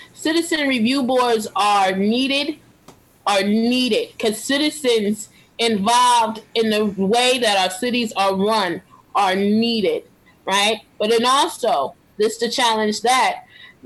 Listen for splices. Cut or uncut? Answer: uncut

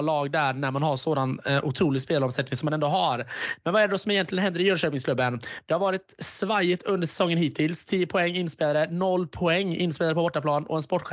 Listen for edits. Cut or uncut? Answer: uncut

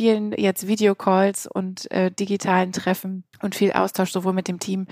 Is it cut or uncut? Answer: cut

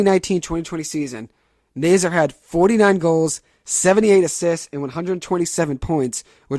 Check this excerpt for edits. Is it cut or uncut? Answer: uncut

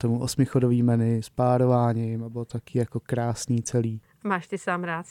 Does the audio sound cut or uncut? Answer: uncut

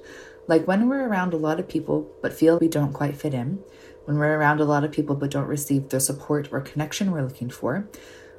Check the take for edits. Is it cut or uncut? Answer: cut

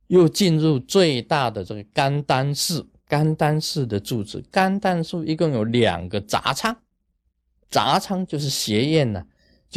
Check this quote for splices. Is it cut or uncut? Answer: uncut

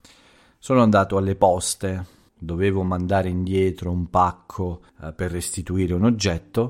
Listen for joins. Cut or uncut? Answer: cut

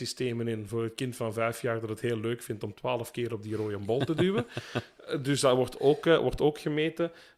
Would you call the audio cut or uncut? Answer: uncut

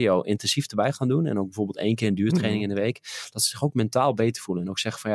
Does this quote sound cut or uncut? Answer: uncut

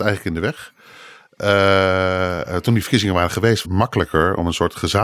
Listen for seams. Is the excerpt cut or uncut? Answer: cut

